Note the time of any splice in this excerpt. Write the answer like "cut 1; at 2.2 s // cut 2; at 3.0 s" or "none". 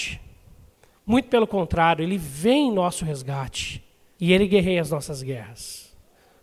cut 1; at 0.9 s // cut 2; at 4.1 s